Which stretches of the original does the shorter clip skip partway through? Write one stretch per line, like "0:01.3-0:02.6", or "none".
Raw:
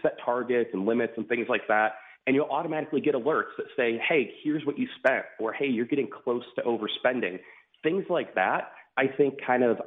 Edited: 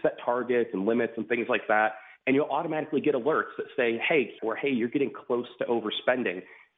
0:04.4-0:05.4